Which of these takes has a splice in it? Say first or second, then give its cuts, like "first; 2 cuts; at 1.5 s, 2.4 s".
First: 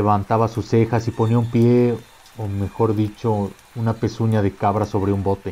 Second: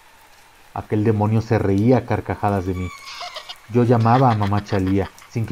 second; 1 cut; at 3.5 s